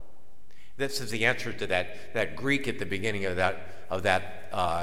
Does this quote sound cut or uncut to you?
uncut